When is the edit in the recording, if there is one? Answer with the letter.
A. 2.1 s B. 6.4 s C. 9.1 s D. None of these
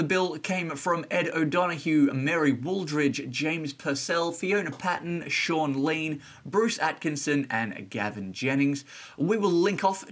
D